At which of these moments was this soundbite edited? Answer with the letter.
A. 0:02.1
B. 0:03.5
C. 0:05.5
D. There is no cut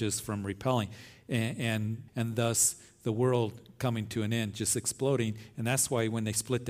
A